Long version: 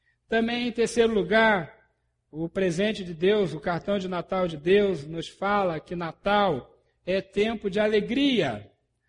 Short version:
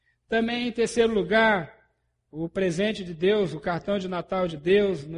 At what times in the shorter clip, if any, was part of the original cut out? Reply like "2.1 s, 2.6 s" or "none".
none